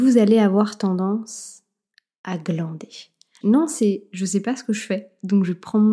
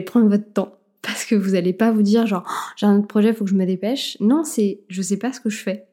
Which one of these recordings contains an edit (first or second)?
first